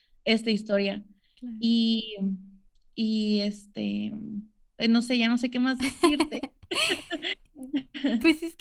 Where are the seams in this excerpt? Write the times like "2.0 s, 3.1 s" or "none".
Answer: none